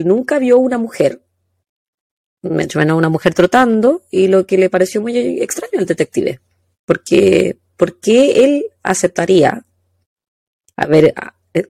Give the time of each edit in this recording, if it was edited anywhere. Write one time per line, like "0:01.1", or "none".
none

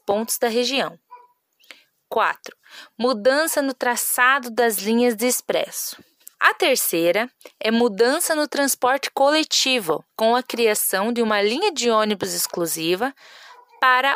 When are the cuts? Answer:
0:06.3
0:10.1

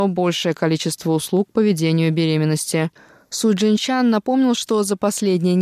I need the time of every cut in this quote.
none

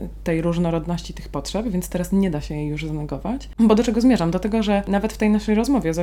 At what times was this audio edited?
none

